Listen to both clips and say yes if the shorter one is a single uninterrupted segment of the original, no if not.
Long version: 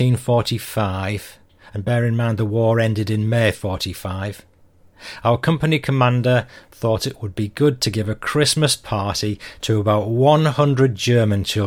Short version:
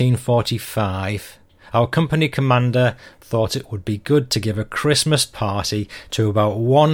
no